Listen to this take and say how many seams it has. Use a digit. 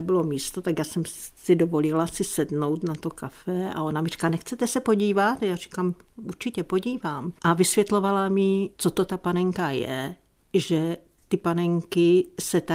0